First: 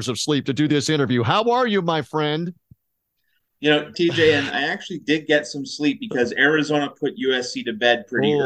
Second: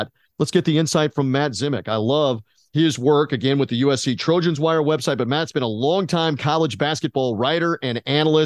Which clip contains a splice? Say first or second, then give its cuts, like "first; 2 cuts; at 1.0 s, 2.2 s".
first; 1 cut; at 3.9 s